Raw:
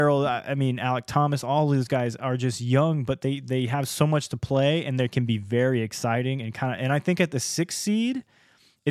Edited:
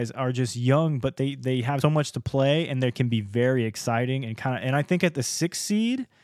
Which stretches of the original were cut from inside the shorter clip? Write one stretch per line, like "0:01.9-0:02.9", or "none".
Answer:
0:03.9-0:04.0